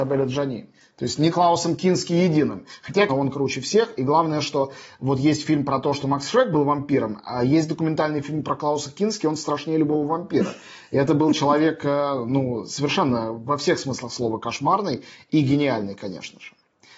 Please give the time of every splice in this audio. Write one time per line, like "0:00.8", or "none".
0:03.1